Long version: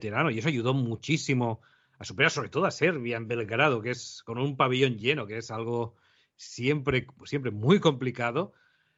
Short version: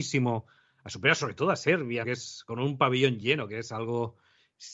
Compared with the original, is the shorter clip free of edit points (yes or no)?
no